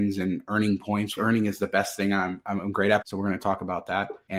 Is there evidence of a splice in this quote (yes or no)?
yes